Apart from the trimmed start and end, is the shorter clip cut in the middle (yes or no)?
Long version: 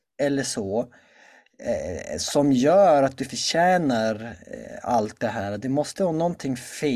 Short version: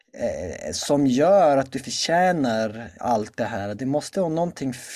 yes